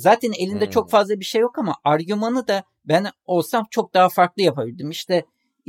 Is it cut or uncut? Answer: uncut